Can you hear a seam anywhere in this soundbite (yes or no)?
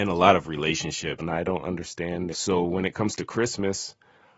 yes